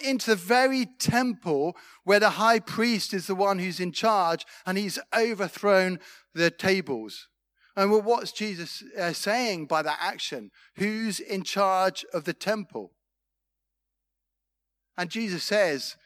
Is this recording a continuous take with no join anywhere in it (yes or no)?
yes